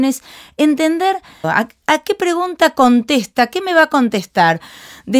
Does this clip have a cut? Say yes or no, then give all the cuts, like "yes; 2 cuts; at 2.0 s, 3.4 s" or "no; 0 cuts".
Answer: yes; 1 cut; at 1.4 s